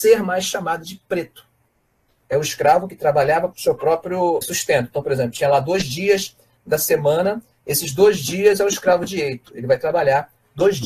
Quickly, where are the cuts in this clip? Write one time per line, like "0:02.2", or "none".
0:02.2